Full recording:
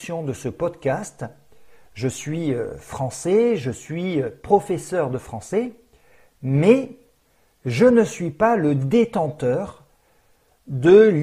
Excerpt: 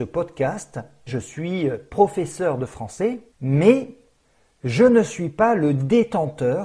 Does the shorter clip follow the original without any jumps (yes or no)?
no